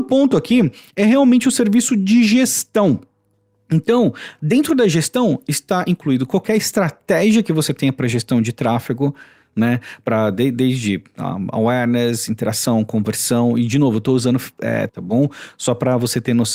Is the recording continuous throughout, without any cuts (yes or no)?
no